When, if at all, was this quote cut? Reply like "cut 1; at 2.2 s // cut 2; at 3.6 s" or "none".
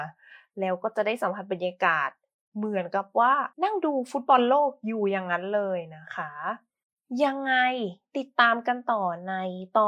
cut 1; at 3.5 s